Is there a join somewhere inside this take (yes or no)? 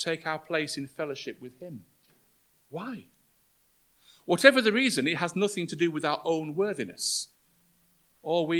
no